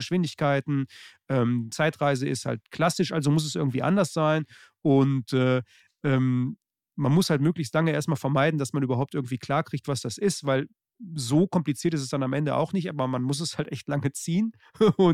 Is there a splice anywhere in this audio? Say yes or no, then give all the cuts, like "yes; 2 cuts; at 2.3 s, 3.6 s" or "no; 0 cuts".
no; 0 cuts